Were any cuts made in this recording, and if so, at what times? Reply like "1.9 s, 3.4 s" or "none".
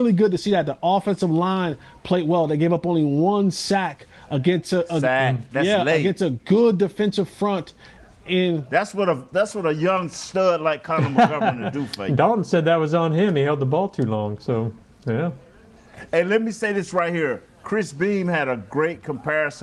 none